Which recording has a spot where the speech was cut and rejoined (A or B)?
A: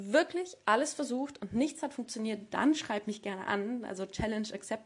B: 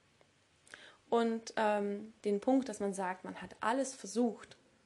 B